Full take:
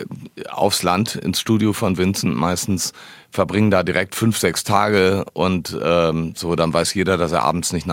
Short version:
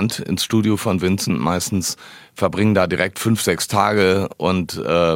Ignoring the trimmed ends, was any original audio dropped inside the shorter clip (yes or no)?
no